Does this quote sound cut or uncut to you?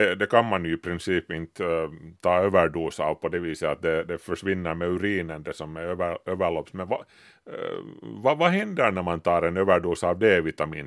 uncut